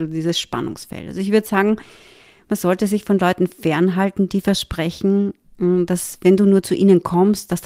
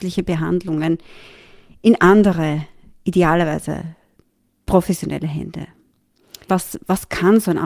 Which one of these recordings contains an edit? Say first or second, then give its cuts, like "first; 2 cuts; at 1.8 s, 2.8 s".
second; 1 cut; at 6.5 s